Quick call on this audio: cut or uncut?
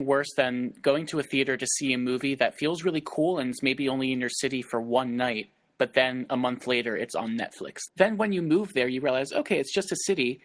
cut